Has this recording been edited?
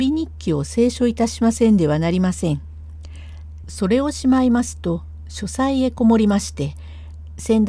yes; 1 cut; at 3.6 s

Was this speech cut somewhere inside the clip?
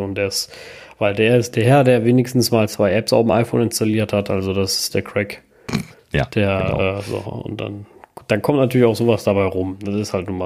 no; 0 cuts

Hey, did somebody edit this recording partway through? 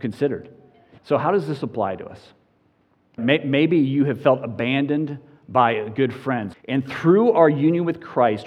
yes; 3 cuts; at 1.0 s, 3.2 s, 6.5 s

